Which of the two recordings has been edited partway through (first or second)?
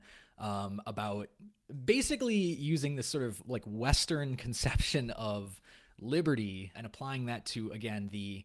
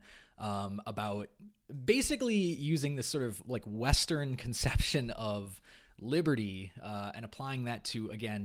first